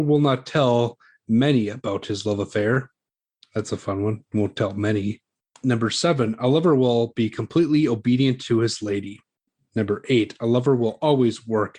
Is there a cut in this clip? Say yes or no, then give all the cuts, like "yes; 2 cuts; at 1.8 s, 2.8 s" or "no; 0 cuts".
no; 0 cuts